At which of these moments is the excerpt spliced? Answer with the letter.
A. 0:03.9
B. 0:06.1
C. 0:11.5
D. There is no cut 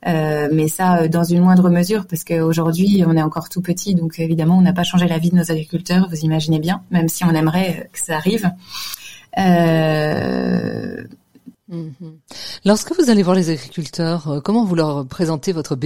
C